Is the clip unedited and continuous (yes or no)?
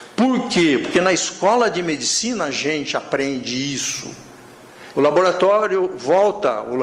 no